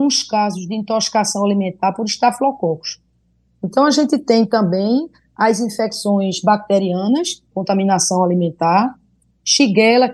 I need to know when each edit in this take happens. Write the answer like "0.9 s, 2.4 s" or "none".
3.5 s, 7.5 s